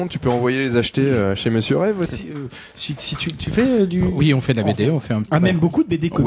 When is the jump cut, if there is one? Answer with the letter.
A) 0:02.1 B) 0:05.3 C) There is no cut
A